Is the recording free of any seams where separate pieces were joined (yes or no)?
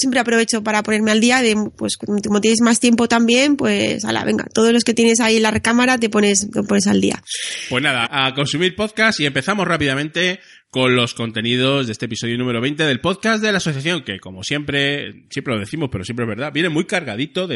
no